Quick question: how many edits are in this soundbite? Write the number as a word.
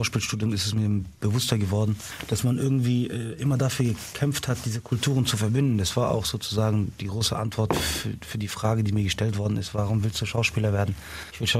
zero